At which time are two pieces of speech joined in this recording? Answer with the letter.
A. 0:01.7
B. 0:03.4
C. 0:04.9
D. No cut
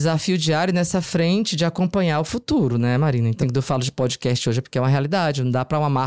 B